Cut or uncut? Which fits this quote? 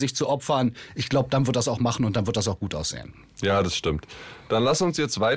uncut